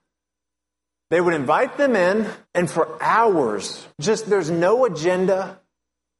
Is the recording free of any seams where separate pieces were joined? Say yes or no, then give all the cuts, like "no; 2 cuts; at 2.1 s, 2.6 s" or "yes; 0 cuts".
no; 2 cuts; at 2.4 s, 3.9 s